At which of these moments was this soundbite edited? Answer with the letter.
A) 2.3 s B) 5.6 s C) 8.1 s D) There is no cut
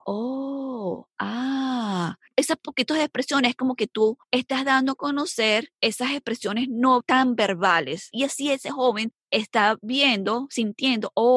C